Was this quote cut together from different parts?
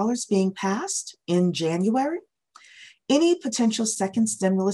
no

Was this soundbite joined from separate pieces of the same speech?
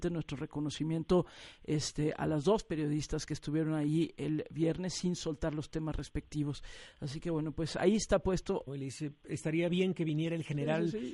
yes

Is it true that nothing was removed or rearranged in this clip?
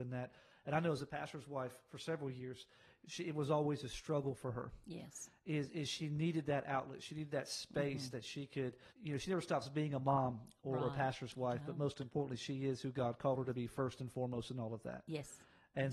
no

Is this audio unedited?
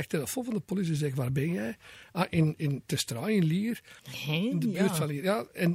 no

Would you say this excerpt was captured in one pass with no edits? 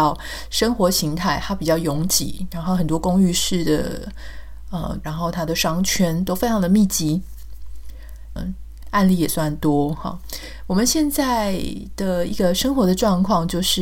no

